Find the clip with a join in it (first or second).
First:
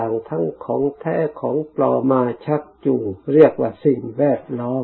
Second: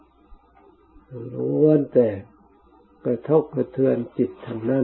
first